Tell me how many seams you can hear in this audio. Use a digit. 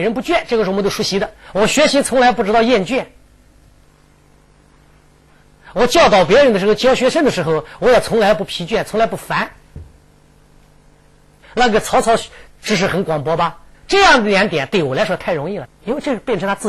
3